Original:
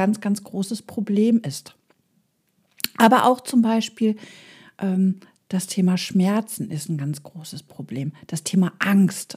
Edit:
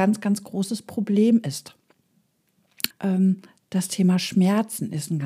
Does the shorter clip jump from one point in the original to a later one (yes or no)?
yes